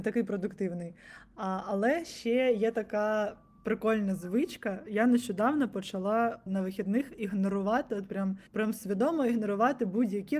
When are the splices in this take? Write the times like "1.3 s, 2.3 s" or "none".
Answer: 6.5 s, 8.5 s

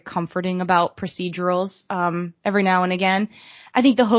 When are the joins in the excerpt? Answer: none

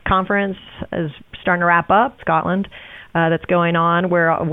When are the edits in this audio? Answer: 2.2 s

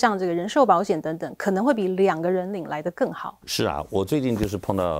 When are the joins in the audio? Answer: 3.4 s

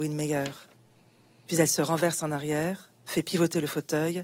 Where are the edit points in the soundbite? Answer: none

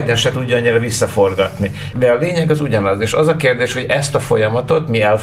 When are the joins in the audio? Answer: 1.9 s

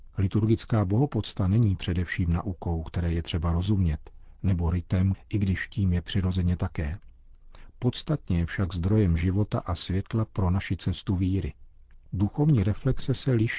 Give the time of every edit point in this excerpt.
5.1 s

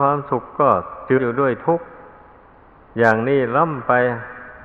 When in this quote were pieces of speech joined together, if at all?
1.2 s

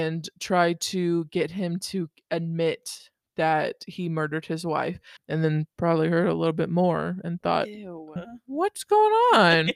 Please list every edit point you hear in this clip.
5.2 s, 8.2 s

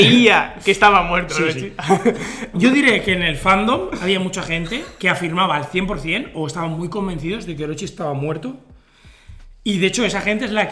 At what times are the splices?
2.5 s

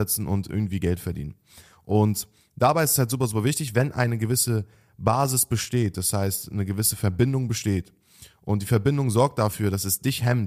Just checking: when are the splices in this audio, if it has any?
none

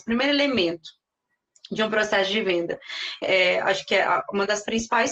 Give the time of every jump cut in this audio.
3.2 s

